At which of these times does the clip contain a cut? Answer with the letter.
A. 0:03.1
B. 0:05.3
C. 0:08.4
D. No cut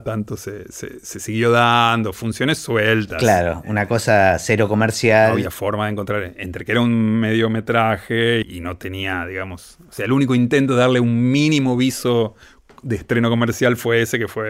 C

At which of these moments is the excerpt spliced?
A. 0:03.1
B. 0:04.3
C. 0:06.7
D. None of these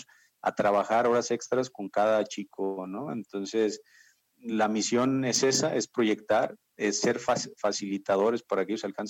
D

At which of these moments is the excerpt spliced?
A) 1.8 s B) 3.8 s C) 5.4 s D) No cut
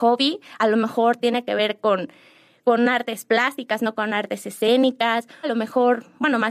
C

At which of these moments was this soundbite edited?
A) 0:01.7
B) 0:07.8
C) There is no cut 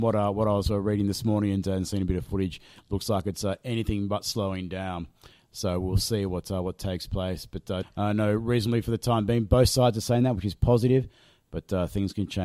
B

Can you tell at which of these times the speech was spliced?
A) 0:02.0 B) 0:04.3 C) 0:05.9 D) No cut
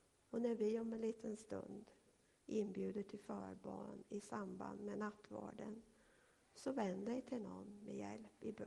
D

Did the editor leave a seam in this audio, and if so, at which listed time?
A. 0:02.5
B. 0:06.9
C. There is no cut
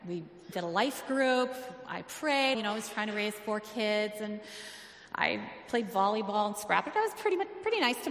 A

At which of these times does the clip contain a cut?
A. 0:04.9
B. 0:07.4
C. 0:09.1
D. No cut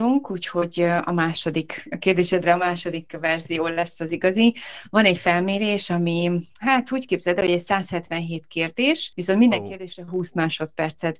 D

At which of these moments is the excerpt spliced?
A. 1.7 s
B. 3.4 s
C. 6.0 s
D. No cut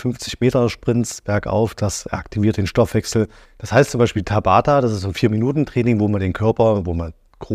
B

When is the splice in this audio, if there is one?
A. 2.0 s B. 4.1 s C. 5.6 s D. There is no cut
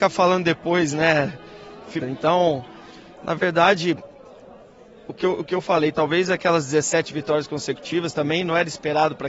A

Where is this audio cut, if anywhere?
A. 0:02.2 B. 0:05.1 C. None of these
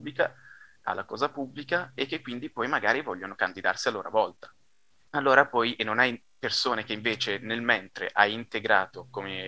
B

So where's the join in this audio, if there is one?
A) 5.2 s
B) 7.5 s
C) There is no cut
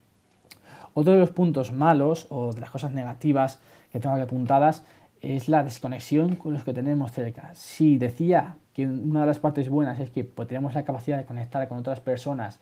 C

